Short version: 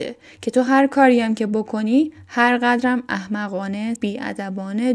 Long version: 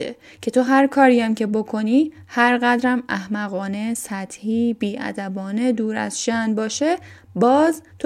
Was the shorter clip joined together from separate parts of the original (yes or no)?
yes